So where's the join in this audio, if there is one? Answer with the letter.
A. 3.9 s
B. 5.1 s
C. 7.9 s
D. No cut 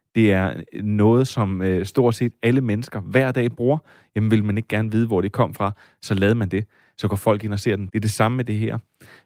C